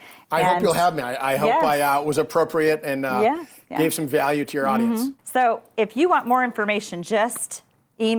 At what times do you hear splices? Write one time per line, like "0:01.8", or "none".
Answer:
0:05.2